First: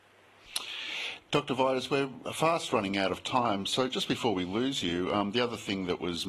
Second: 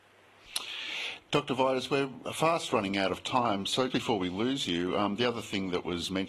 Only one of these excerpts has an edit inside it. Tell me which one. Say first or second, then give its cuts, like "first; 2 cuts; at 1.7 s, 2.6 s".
second; 1 cut; at 3.9 s